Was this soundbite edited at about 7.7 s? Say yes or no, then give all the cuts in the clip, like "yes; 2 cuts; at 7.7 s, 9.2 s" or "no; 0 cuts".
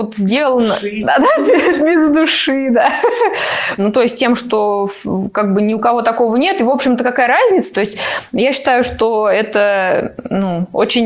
yes; 2 cuts; at 3.8 s, 7.7 s